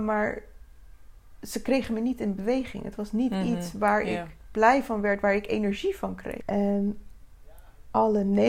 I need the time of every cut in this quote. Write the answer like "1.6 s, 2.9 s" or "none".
6.4 s